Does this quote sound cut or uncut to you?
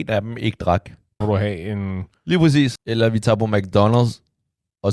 cut